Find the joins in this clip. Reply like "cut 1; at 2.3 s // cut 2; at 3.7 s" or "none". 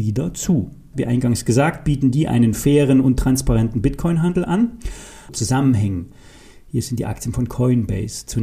cut 1; at 0.9 s // cut 2; at 5.3 s